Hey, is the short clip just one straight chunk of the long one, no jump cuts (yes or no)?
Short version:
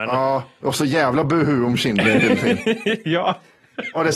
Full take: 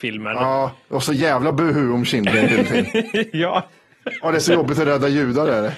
yes